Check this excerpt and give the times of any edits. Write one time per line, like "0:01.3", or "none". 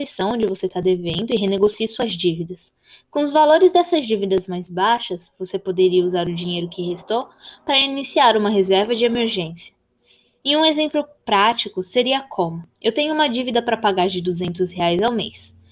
none